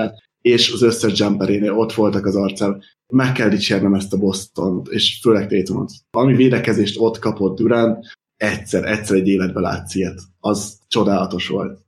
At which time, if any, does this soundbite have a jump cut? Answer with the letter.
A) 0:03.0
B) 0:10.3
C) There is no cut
C